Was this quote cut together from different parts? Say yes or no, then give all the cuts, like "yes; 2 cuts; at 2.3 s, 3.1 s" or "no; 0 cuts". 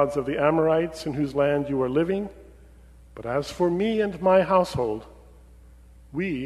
no; 0 cuts